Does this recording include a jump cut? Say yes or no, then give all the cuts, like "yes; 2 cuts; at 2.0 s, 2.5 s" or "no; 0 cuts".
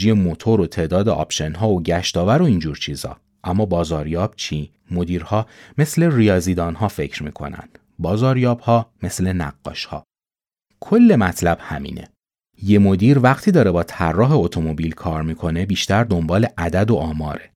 yes; 2 cuts; at 4.8 s, 10.7 s